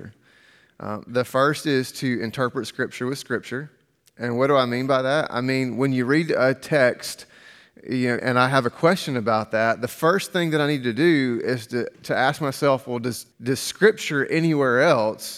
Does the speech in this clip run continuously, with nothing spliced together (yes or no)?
no